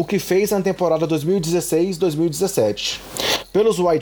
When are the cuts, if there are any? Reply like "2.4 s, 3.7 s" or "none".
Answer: none